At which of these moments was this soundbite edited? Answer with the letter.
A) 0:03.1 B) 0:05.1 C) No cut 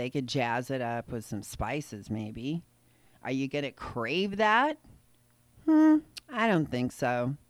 C